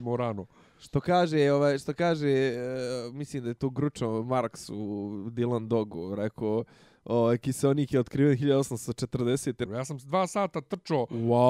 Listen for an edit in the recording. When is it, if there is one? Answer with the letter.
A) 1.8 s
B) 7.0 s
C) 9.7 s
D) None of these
C